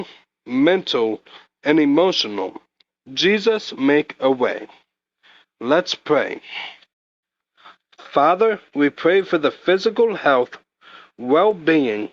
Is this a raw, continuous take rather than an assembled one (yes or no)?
yes